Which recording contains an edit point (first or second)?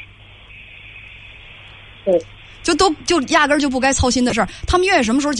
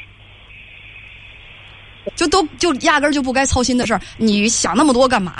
second